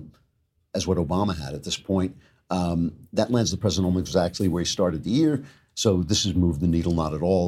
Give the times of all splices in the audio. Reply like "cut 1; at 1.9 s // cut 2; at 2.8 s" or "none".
none